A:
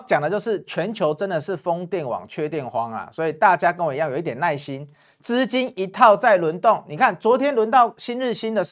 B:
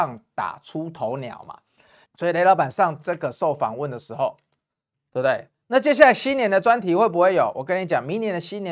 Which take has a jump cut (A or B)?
B